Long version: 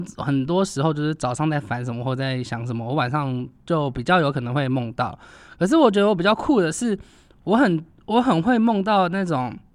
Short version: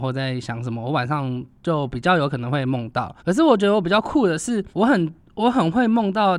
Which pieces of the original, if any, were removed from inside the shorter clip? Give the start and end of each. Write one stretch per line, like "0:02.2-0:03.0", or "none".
0:05.2-0:05.5
0:07.0-0:07.4